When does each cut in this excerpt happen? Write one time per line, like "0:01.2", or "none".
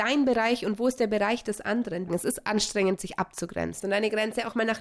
0:02.1
0:03.8